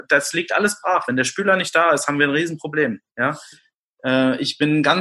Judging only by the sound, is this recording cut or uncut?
uncut